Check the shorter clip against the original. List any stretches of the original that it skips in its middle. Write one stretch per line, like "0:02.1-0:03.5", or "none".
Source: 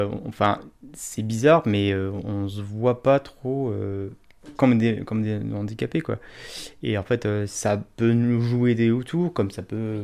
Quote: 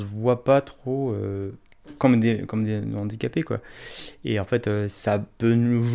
none

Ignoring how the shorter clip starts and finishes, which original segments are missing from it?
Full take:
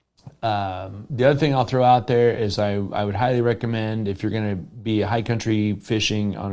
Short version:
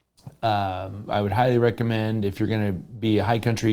0:01.1-0:02.9

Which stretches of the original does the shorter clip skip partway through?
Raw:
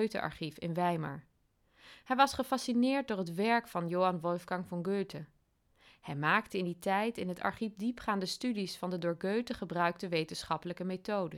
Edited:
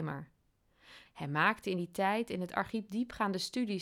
0:02.0-0:05.9

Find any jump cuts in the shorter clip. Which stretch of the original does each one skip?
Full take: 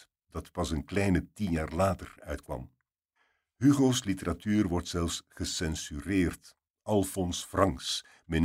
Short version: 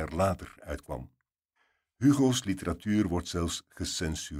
none

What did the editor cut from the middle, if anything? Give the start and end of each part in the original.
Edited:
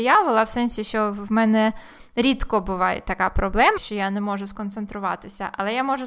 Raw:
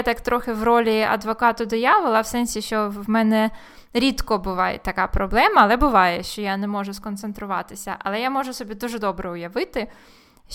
0:05.5-0:06.2

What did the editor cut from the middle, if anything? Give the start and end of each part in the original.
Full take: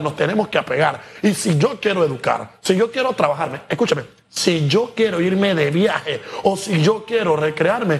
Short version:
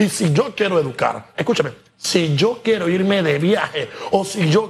0:02.6-0:03.7

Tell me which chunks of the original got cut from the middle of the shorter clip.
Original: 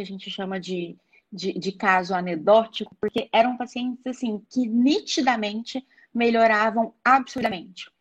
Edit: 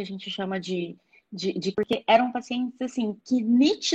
0:01.7-0:03.0

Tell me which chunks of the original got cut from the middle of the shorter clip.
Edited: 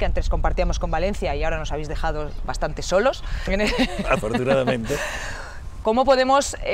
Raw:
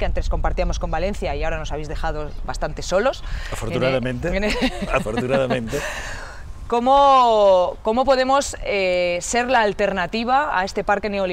0:03.5-0:04.3
0:06.7-0:07.8

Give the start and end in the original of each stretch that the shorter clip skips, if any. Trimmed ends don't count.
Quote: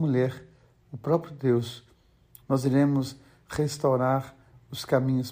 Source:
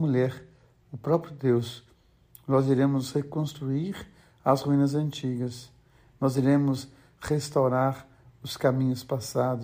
0:02.4-0:06.1

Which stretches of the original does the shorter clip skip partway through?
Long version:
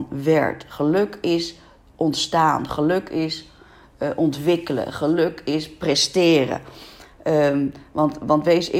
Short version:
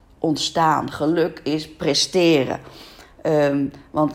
0:02.7-0:04.9

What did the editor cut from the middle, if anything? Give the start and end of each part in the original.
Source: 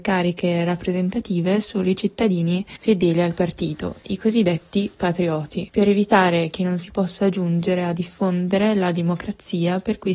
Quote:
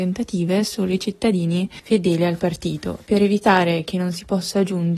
0:04.0-0:05.7

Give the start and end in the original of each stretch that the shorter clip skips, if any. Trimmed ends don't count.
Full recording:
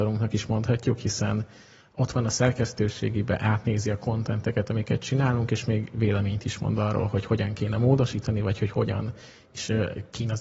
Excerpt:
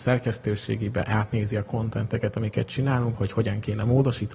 0:05.5-0:07.1

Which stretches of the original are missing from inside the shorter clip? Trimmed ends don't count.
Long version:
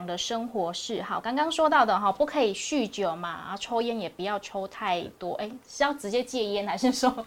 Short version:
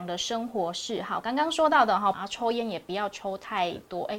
0:02.1-0:03.4

